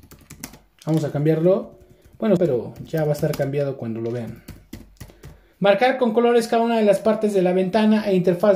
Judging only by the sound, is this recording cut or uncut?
cut